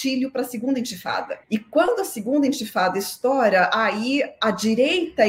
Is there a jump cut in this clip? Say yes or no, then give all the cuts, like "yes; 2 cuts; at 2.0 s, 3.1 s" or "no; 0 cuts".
yes; 1 cut; at 1.4 s